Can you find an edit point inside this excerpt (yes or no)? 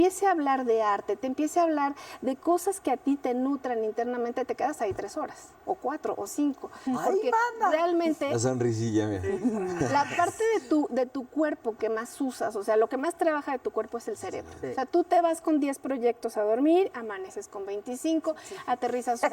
no